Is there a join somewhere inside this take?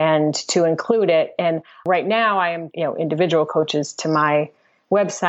yes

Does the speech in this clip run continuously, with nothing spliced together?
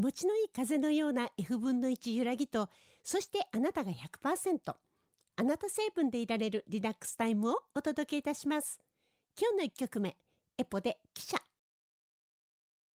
yes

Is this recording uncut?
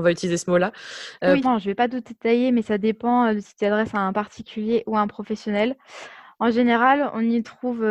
no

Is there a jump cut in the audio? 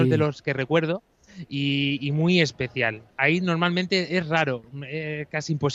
no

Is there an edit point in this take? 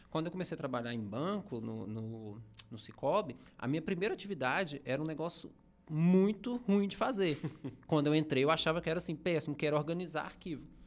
no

